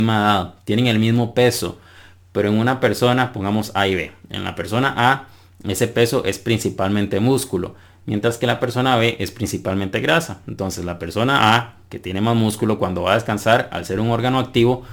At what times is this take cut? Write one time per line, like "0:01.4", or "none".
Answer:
none